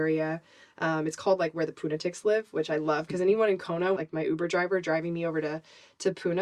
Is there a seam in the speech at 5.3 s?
no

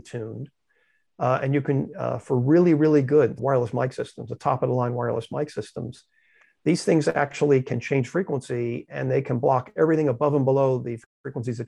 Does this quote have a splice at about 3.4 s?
yes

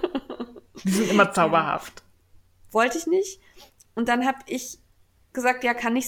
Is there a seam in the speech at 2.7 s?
yes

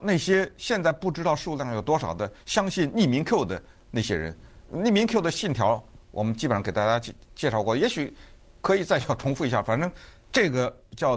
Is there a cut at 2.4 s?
no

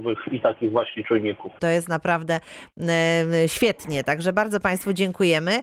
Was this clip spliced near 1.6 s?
yes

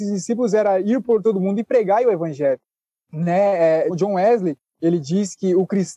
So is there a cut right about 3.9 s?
yes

